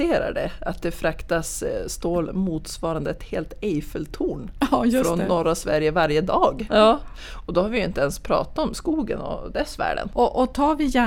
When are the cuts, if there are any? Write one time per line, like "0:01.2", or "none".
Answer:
0:06.7
0:10.1